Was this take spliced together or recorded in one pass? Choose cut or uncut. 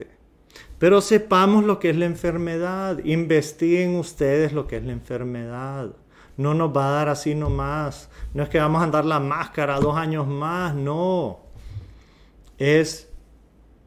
uncut